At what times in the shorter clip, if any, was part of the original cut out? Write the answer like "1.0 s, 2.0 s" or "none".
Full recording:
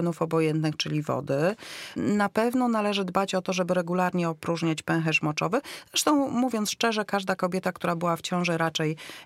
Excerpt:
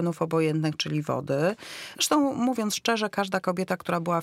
1.9 s